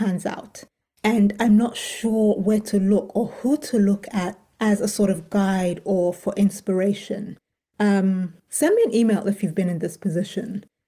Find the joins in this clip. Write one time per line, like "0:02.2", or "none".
0:08.4